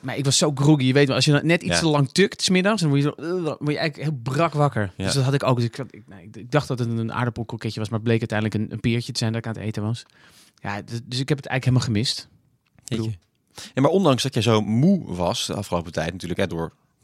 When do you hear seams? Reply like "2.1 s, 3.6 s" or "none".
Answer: none